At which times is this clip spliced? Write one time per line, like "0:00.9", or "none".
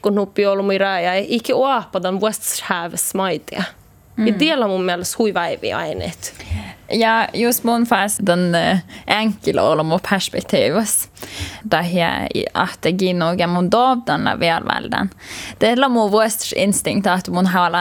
0:08.2
0:11.6